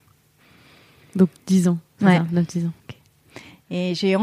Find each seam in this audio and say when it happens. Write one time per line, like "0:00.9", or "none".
0:02.8

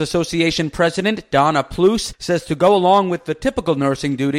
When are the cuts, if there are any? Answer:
none

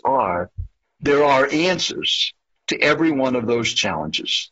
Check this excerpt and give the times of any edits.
none

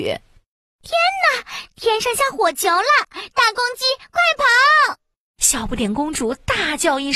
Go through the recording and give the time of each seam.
none

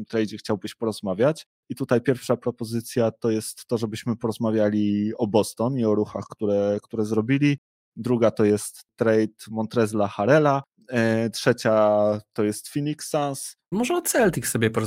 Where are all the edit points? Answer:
0:13.7

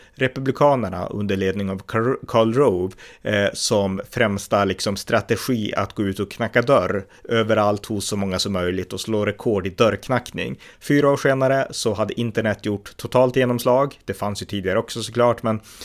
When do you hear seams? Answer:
0:10.7

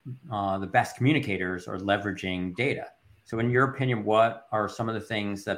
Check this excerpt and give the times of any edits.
none

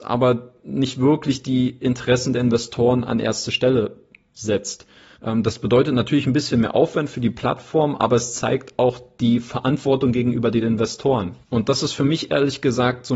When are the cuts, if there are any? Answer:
0:05.2
0:11.4

